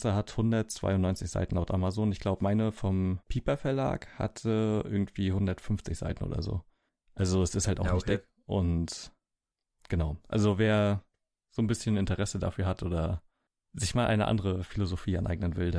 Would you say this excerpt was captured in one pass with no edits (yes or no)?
no